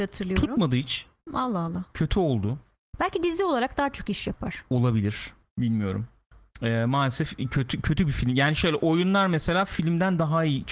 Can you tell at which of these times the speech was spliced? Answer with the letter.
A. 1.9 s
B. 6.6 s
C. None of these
C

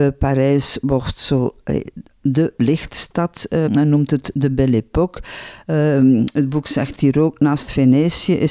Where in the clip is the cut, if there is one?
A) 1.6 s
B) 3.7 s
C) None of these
B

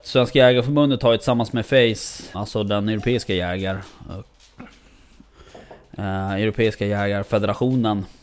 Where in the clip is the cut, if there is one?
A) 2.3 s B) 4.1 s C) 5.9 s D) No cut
A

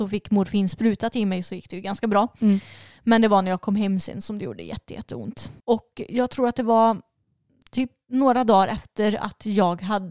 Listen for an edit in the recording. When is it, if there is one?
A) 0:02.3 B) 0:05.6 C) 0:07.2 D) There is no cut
B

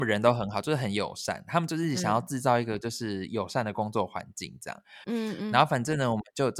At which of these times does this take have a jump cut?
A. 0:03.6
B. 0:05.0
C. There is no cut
B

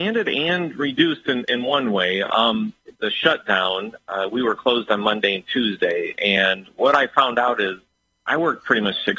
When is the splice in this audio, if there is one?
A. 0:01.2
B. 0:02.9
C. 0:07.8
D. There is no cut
B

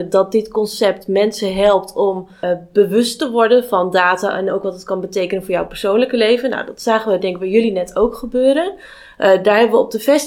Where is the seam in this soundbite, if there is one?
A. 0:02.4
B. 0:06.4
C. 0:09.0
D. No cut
A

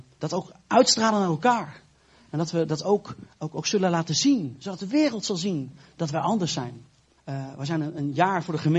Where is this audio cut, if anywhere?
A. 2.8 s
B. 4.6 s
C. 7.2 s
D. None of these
C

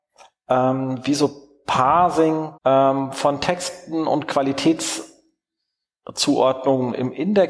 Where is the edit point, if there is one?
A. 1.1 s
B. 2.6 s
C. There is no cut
B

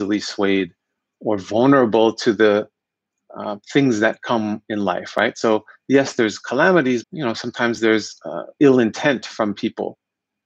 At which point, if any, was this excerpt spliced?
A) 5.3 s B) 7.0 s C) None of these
B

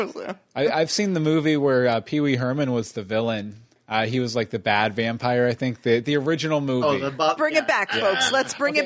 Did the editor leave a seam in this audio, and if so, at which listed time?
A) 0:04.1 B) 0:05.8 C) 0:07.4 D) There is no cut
C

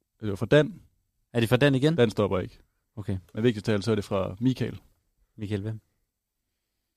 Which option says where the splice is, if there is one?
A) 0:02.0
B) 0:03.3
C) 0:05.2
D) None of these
D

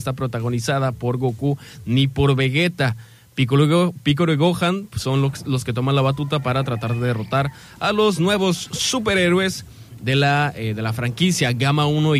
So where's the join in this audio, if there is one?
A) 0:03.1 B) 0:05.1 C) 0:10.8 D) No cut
D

